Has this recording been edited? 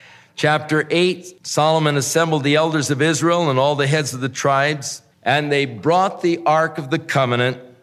yes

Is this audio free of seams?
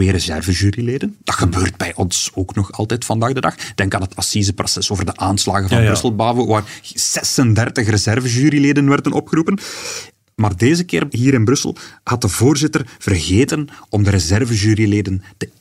no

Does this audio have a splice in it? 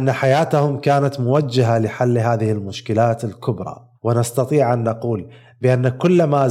yes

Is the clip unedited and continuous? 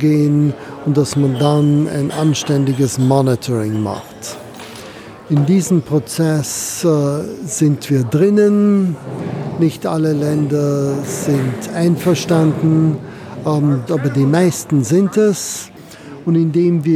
no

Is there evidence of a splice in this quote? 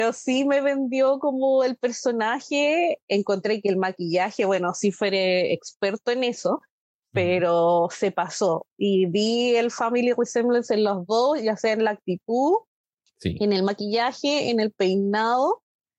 no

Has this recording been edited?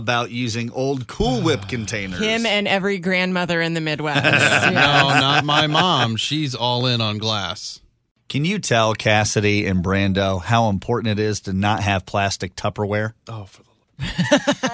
no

